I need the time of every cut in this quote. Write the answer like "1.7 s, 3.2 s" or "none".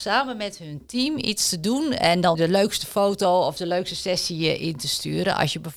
2.4 s